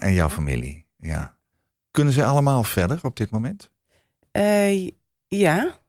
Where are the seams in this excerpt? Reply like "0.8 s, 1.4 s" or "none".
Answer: none